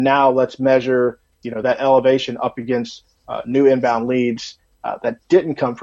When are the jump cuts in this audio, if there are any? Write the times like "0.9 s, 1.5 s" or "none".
none